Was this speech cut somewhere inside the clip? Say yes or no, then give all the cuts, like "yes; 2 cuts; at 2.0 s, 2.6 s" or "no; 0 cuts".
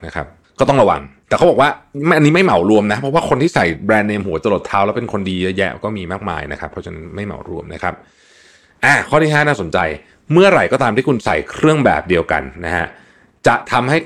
no; 0 cuts